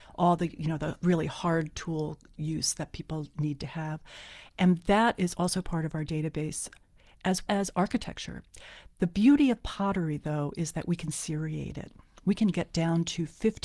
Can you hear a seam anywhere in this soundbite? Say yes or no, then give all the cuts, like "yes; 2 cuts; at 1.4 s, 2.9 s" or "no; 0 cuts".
yes; 1 cut; at 7.5 s